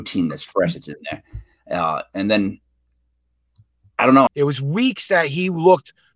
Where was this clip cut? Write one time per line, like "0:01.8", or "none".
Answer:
0:04.3